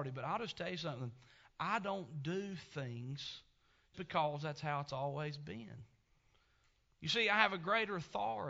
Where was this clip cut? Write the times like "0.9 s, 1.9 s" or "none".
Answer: 3.9 s

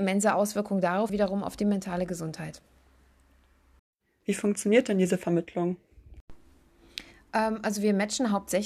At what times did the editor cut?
1.1 s, 4.2 s

